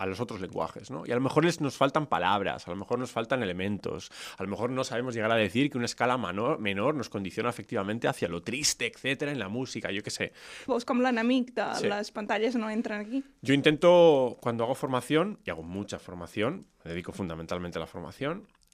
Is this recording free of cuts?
no; 1 cut; at 10.7 s

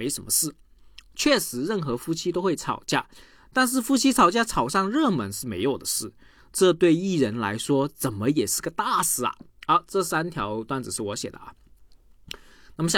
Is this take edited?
no; 0 cuts

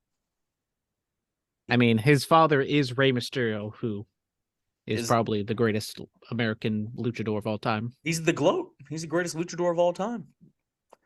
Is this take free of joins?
no; 1 cut; at 1.7 s

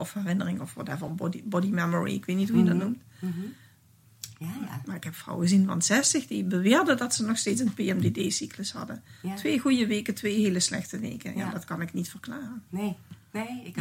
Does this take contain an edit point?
no; 0 cuts

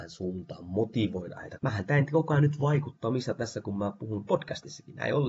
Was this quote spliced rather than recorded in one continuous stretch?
yes; 1 cut; at 1.6 s

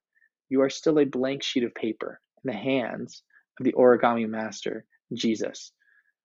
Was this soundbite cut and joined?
yes; 1 cut; at 2.3 s

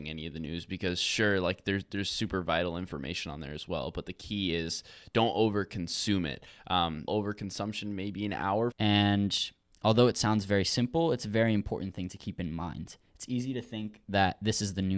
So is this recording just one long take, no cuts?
no; 2 cuts; at 7.1 s, 8.7 s

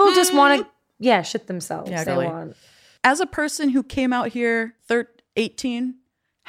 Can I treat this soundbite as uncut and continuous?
no; 2 cuts; at 2.0 s, 4.8 s

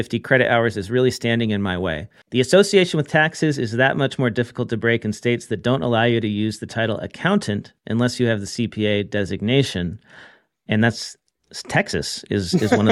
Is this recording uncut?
no; 1 cut; at 2.2 s

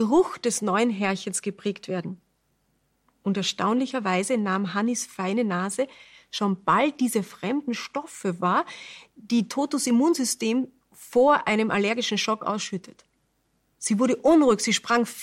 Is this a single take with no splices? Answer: yes; 0 cuts

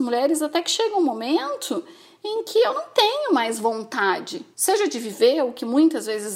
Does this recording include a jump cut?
yes; 1 cut; at 4.5 s

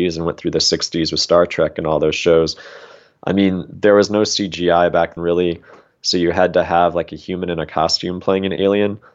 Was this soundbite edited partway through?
yes; 1 cut; at 5.2 s

